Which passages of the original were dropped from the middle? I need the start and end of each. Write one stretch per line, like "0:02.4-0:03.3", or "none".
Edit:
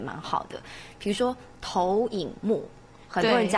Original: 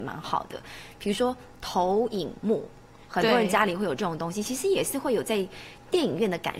none